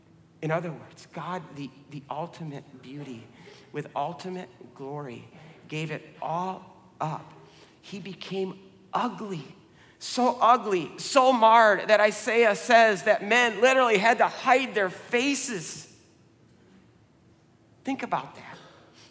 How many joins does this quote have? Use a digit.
0